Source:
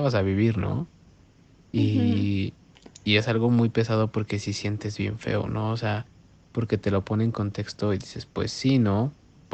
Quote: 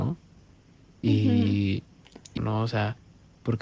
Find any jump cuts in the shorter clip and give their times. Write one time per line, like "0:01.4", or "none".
0:02.4